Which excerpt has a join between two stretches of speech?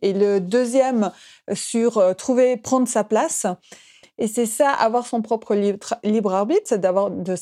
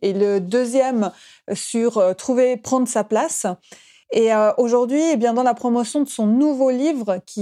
first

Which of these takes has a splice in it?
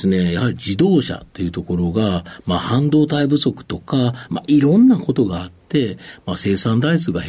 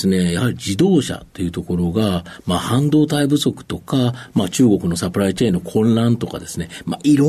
first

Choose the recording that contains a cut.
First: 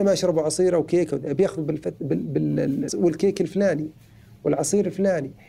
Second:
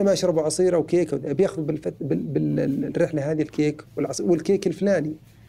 first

